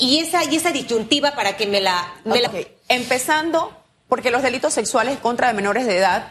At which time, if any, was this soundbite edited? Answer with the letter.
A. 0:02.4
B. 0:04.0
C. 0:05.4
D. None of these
A